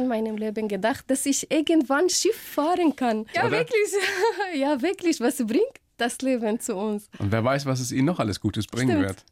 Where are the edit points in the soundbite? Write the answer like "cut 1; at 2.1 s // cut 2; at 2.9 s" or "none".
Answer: cut 1; at 3.3 s

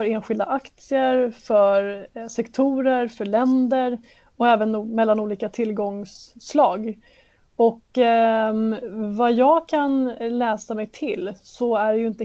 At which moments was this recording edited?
none

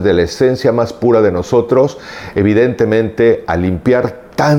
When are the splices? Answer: none

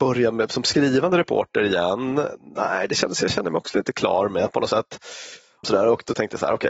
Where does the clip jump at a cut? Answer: cut 1; at 5.6 s

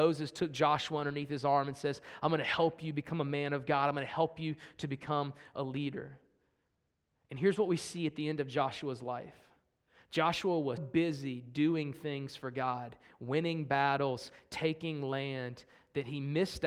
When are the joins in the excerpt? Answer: cut 1; at 10.8 s

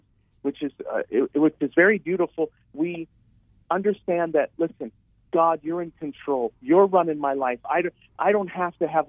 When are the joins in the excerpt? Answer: none

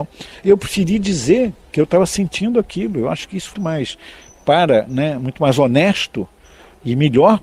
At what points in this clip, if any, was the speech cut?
cut 1; at 3.5 s

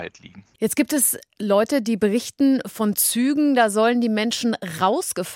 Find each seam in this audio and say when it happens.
none

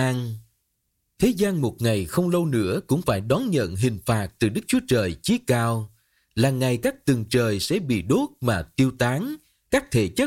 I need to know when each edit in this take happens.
none

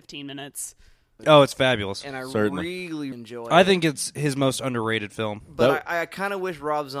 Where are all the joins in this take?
cut 1; at 1.2 s // cut 2; at 3.1 s

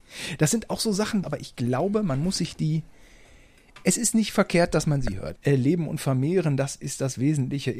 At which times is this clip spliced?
cut 1; at 1.2 s // cut 2; at 5.4 s

